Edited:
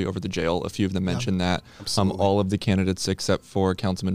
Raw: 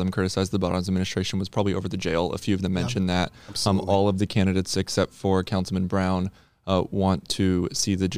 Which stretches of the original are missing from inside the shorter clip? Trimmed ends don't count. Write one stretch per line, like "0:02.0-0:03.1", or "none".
none